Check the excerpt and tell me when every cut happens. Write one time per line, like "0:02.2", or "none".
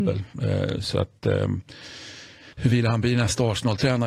0:02.5